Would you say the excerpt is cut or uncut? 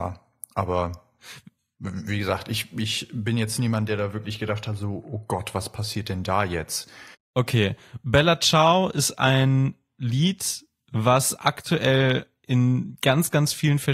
cut